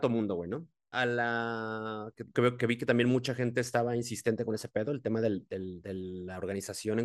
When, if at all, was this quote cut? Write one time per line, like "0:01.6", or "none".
0:00.9
0:02.3